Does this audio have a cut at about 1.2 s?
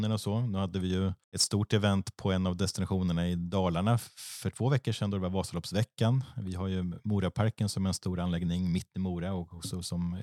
yes; 1 cut; at 1.2 s

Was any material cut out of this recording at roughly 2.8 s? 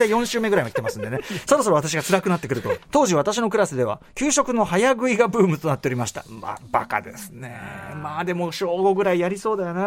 yes; 1 cut; at 2.8 s

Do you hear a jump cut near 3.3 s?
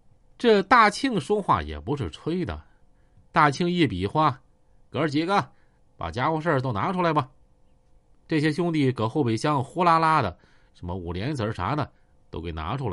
yes; 1 cut; at 3.3 s

